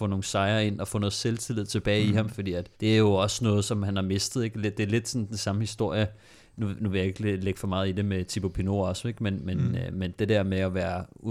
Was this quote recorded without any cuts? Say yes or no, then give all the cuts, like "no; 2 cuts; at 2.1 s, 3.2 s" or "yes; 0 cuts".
no; 1 cut; at 2.7 s